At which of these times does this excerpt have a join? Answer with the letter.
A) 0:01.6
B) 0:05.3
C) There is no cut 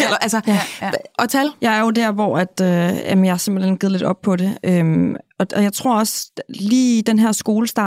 A